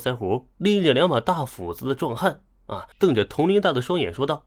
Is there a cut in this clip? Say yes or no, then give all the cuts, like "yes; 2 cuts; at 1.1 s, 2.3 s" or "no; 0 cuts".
yes; 1 cut; at 2.9 s